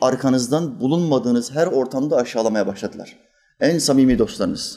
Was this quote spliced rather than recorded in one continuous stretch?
no; 0 cuts

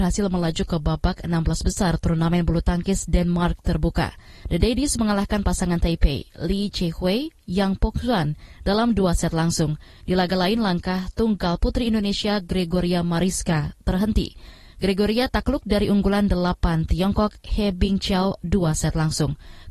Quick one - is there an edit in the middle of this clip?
no; 0 cuts

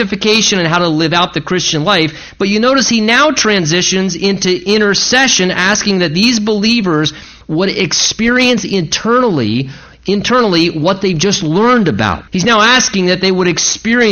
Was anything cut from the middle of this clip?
yes; 1 cut; at 12.3 s

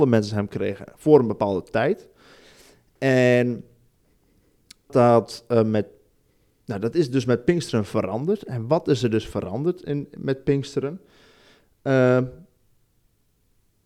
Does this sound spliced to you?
yes; 1 cut; at 4.9 s

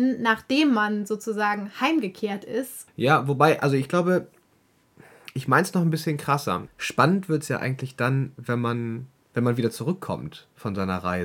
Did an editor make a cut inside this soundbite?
yes; 2 cuts; at 2.9 s, 6.7 s

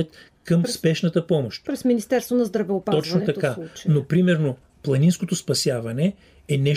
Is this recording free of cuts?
yes; 0 cuts

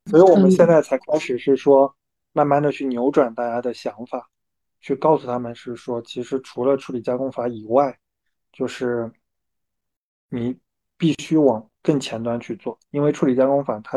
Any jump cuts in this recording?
no; 0 cuts

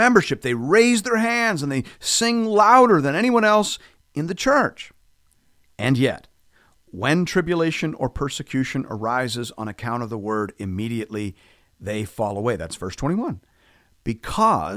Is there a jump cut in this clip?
no; 0 cuts

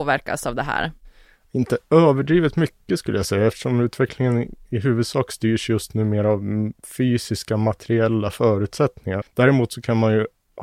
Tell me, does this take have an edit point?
yes; 1 cut; at 9.2 s

